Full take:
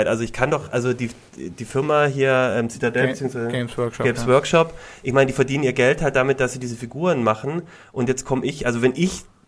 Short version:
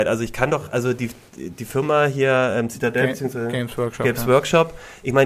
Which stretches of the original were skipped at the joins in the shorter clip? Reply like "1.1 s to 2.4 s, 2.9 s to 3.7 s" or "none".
none

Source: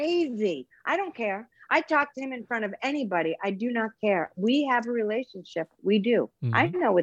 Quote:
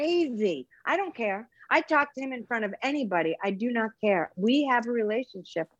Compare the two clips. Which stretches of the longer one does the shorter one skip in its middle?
none

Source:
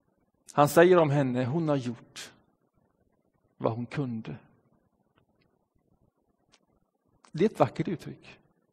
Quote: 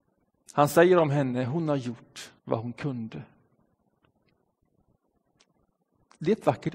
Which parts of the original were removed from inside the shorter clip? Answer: 2.4 s to 3.5 s

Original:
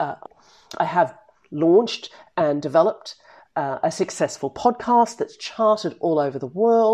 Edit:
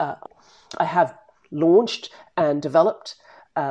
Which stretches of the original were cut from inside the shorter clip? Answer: none

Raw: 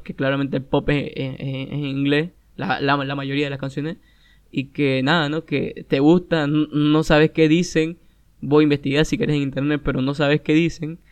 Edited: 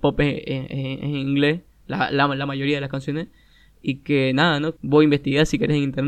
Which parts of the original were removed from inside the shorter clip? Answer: 5.5 s to 8.4 s

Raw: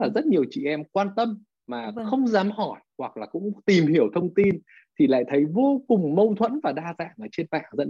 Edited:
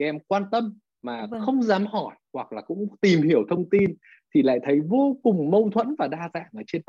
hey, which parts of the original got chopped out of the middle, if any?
none

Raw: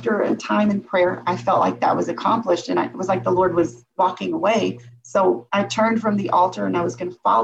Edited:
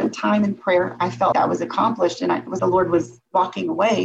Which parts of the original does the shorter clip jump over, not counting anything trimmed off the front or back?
1.6 s to 1.8 s, 3.1 s to 3.2 s

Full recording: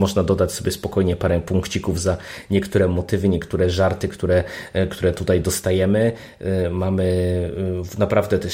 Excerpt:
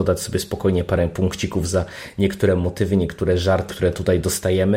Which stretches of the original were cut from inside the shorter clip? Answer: 4.0 s to 4.9 s

